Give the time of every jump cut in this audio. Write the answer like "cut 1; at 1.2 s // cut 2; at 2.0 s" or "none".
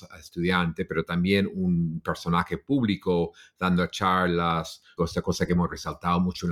cut 1; at 5.0 s